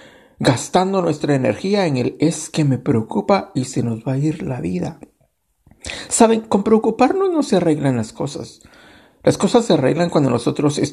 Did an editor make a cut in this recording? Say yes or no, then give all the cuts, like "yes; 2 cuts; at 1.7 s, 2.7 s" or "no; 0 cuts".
no; 0 cuts